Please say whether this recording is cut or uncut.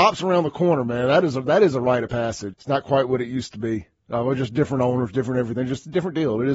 cut